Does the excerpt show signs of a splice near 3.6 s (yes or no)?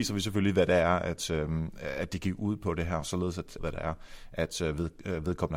yes